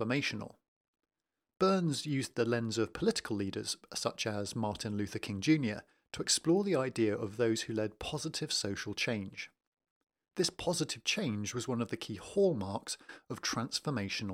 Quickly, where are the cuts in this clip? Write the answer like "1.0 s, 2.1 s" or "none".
none

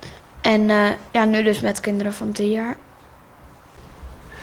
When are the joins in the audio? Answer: 1.1 s

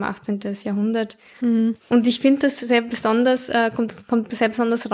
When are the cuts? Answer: none

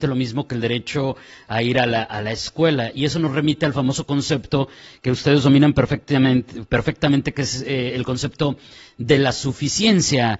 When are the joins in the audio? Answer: none

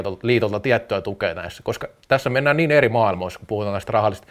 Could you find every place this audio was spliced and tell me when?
none

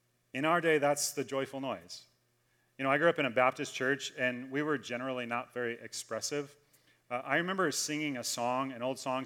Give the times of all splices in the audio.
none

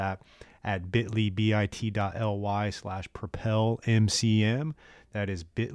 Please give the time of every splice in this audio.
none

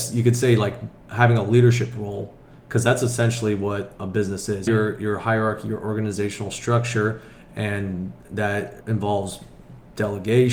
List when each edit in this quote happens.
4.7 s, 8.8 s

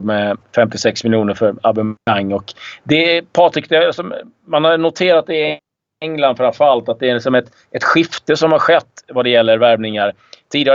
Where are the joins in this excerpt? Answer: none

